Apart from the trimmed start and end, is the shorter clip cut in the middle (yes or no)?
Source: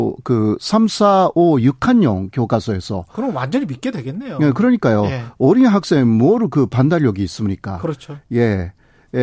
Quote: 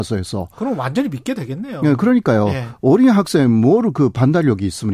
no